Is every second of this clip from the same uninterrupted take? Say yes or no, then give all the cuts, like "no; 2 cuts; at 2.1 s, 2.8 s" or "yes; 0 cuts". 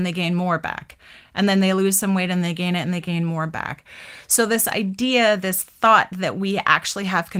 yes; 0 cuts